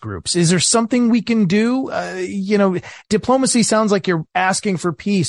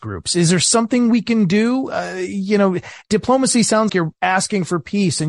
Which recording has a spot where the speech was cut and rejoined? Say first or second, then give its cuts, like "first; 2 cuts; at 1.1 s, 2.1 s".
second; 1 cut; at 3.9 s